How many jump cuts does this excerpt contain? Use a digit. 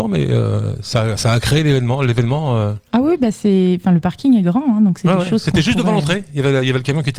0